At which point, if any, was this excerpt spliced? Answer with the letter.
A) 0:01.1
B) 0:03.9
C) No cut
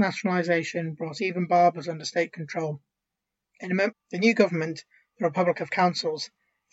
B